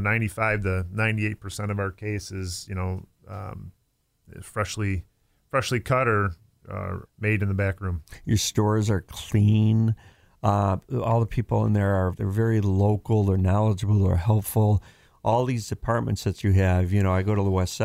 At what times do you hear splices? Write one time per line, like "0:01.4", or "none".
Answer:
0:07.0
0:12.1

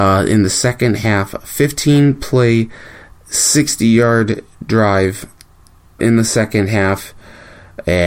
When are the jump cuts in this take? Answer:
0:06.0

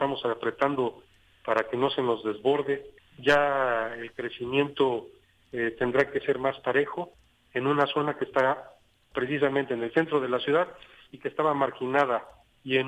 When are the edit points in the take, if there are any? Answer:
0:03.0

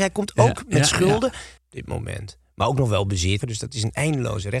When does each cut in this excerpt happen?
0:01.6
0:03.4

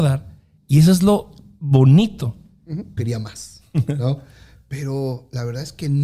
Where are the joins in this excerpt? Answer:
0:03.0

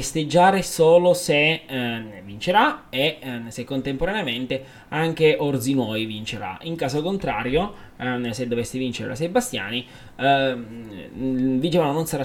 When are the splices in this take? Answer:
none

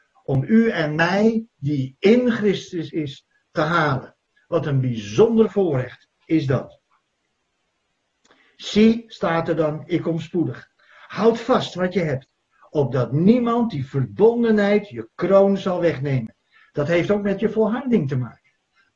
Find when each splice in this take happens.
none

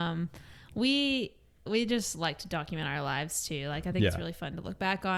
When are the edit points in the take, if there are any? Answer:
0:01.7

